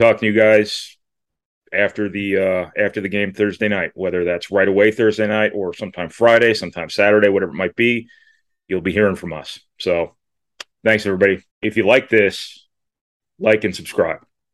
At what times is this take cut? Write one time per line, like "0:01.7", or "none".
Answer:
0:11.5